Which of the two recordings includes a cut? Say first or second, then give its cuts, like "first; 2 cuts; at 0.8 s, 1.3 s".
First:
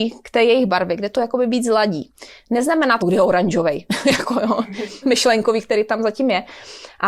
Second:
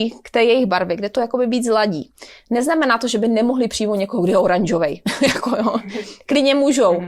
first; 2 cuts; at 3.0 s, 5.0 s